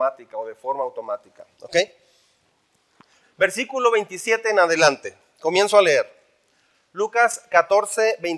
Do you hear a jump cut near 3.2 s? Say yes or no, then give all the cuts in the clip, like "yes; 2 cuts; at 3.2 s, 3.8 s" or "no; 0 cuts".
yes; 1 cut; at 3.2 s